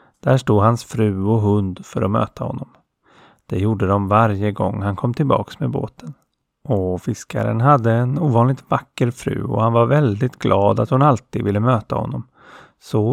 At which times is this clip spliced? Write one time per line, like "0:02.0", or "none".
none